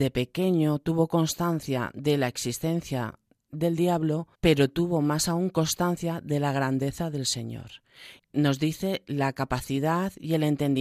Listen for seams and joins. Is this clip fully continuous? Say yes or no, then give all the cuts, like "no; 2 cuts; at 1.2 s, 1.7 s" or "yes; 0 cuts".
no; 2 cuts; at 4.3 s, 8.2 s